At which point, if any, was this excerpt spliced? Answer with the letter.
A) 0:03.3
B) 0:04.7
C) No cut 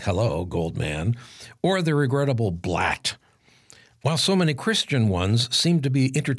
C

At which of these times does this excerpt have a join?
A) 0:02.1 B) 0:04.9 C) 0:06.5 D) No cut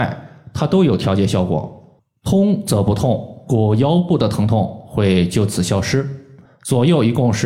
C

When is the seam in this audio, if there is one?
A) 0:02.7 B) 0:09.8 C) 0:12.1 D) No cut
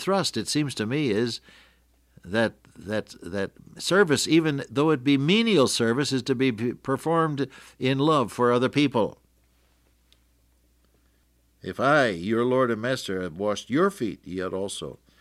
D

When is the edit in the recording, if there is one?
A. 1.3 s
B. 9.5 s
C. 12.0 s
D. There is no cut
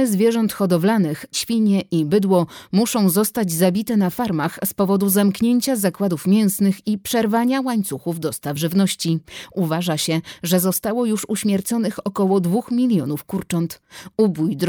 A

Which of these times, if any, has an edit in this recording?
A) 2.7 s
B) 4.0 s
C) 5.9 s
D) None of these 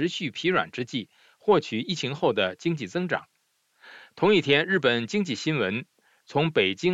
D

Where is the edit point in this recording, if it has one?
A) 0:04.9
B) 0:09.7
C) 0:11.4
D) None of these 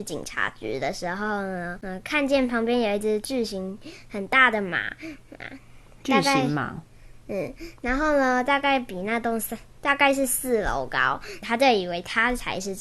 C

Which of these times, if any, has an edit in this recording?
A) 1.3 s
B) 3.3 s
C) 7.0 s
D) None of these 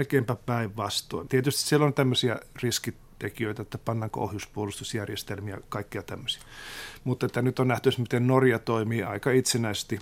A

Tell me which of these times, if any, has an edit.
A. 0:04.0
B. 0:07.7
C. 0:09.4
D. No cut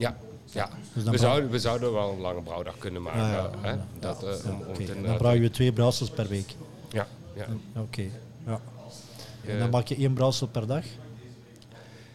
C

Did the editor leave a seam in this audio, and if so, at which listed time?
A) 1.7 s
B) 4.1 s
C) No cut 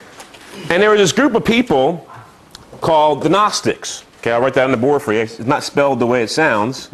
B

